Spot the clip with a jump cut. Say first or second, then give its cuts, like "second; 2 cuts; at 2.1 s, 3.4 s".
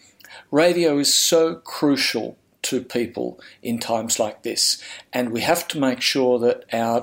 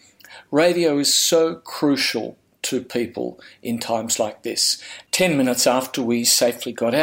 second; 1 cut; at 5.1 s